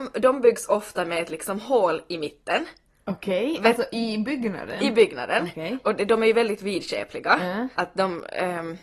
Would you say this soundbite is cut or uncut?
cut